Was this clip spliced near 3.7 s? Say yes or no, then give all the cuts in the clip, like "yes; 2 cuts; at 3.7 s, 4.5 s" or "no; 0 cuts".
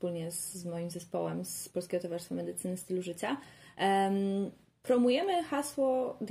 no; 0 cuts